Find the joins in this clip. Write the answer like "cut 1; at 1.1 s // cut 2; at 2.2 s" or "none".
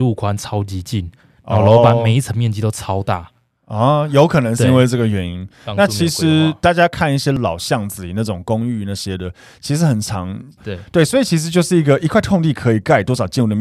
cut 1; at 10.6 s